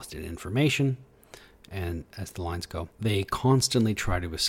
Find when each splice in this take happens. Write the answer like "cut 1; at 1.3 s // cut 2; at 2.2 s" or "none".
cut 1; at 2.9 s

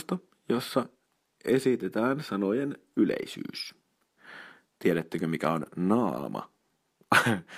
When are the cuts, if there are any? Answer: none

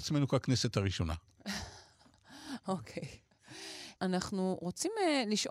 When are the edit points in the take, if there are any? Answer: cut 1; at 4.0 s

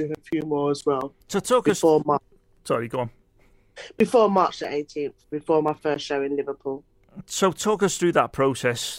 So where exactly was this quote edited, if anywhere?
cut 1; at 1.2 s

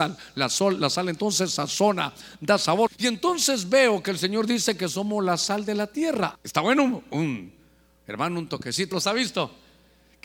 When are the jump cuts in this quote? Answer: cut 1; at 2.9 s // cut 2; at 6.3 s // cut 3; at 8.9 s

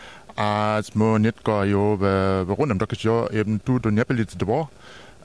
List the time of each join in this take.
cut 1; at 3.8 s

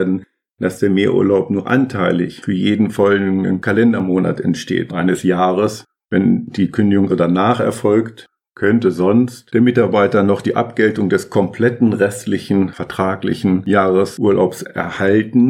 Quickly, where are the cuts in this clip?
cut 1; at 4.9 s // cut 2; at 7.1 s

